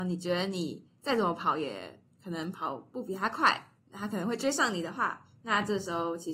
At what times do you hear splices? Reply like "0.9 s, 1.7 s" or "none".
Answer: 3.8 s